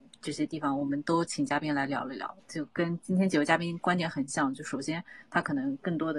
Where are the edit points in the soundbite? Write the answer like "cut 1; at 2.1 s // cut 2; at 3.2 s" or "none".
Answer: cut 1; at 2.4 s

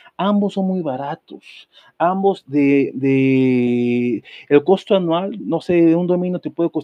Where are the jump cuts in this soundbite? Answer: none

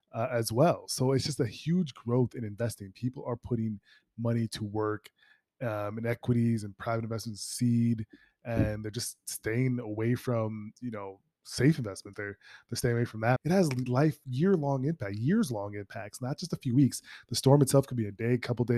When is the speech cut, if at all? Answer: cut 1; at 12.1 s // cut 2; at 13.4 s

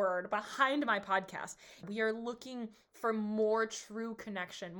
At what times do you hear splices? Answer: cut 1; at 1.8 s

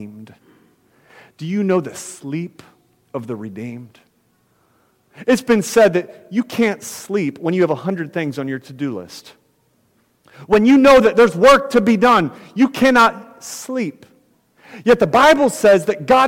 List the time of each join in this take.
none

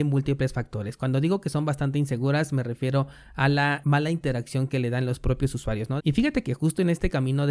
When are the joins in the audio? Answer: cut 1; at 3.8 s // cut 2; at 6.0 s

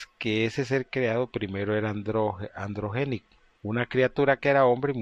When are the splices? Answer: cut 1; at 3.6 s

